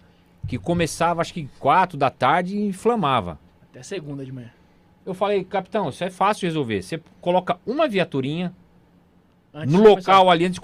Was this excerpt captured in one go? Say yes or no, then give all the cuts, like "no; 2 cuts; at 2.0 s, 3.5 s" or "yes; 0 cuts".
yes; 0 cuts